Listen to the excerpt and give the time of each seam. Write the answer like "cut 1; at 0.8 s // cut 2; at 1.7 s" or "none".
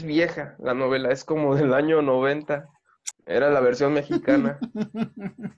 cut 1; at 3.1 s

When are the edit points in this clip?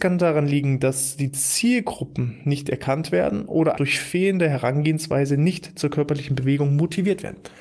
cut 1; at 3.7 s

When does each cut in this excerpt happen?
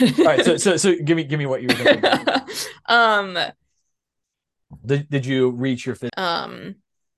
cut 1; at 4.8 s // cut 2; at 6.1 s

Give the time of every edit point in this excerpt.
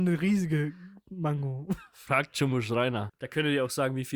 cut 1; at 3.1 s

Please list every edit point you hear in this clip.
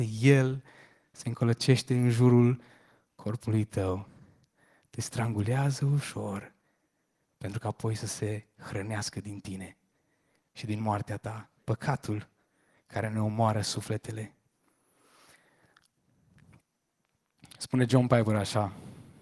cut 1; at 11.6 s

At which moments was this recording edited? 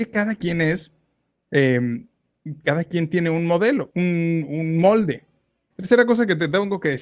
cut 1; at 5.7 s

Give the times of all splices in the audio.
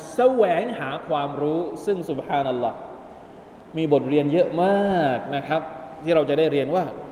none

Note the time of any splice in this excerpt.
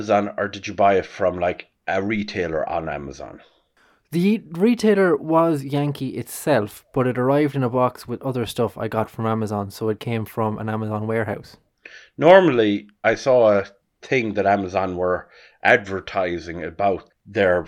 cut 1; at 13.0 s

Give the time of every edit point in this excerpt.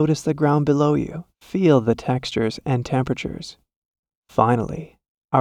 cut 1; at 1.3 s

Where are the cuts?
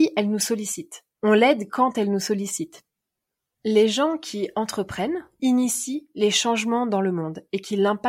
cut 1; at 5.4 s

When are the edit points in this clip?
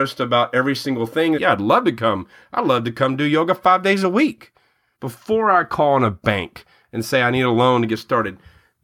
cut 1; at 1.3 s // cut 2; at 4.9 s

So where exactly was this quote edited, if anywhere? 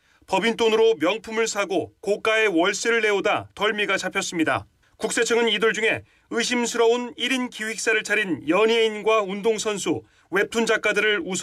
cut 1; at 4.8 s

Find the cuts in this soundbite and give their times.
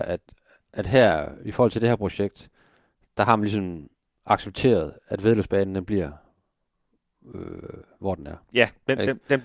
none

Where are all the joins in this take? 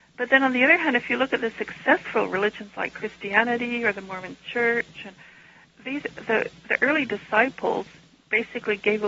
none

